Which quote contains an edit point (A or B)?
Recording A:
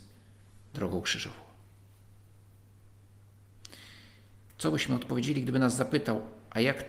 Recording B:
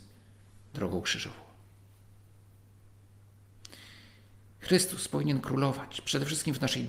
A